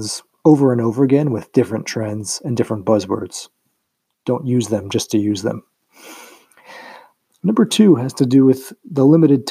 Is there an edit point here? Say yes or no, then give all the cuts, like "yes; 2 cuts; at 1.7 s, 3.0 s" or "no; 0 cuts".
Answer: no; 0 cuts